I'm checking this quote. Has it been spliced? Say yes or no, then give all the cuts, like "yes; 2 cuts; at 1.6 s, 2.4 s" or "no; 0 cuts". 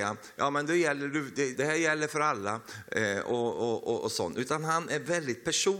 yes; 1 cut; at 1.5 s